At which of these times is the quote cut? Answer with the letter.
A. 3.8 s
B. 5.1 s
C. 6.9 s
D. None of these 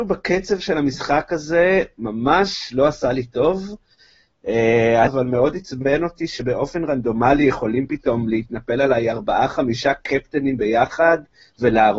B